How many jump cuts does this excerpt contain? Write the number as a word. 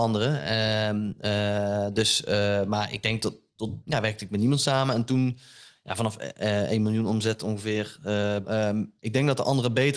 two